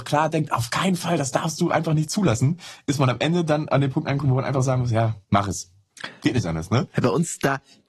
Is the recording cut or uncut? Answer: cut